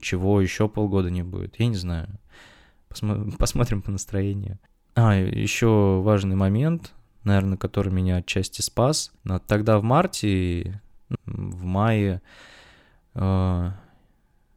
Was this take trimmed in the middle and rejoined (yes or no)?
yes